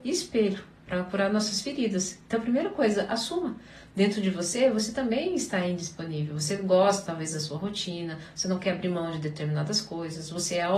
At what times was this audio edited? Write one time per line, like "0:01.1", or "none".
none